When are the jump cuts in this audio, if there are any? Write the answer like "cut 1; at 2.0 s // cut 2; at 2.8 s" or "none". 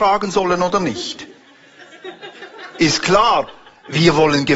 none